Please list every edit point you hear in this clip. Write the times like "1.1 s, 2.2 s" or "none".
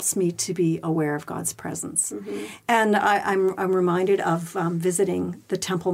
none